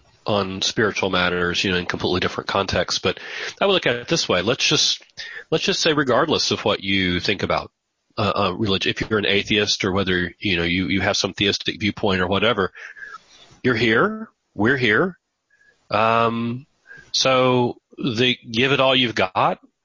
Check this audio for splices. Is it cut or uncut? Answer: uncut